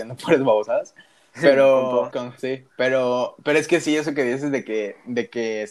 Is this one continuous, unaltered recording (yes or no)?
no